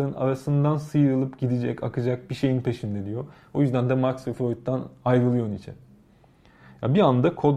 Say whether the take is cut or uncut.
uncut